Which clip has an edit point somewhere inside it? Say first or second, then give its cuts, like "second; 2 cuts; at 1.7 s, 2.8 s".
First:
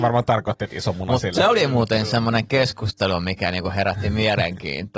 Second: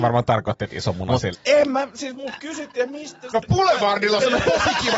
second; 2 cuts; at 1.3 s, 3.3 s